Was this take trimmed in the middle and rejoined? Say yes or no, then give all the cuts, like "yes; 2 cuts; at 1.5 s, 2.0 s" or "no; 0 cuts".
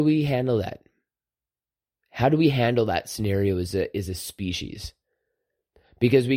no; 0 cuts